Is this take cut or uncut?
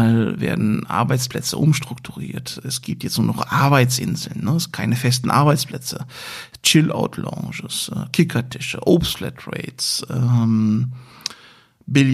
uncut